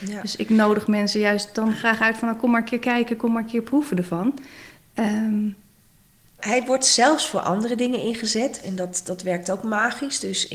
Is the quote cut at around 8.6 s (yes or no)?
yes